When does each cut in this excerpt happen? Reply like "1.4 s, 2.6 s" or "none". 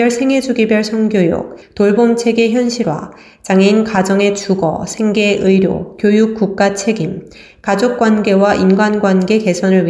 1.6 s